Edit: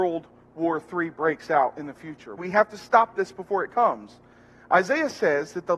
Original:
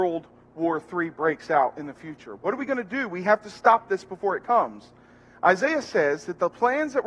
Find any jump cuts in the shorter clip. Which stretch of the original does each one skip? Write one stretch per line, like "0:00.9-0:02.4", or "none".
0:02.4-0:03.1